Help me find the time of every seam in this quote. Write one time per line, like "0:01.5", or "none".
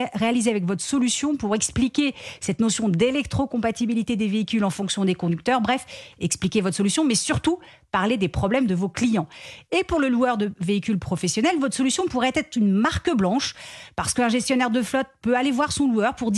none